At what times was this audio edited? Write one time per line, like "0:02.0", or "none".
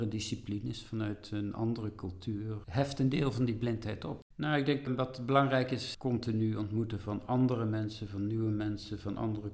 0:02.6
0:04.3